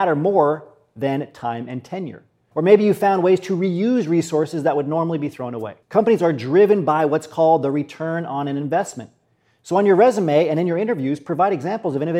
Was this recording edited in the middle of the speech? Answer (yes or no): yes